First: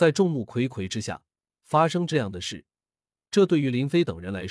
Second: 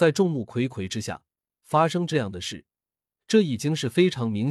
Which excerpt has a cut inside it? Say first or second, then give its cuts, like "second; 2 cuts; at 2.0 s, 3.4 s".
second; 1 cut; at 3.2 s